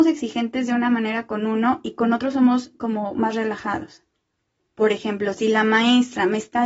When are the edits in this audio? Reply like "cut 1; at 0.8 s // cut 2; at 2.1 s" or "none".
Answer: cut 1; at 4.6 s